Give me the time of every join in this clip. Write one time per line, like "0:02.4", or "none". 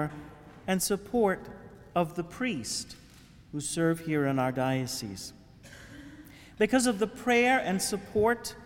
none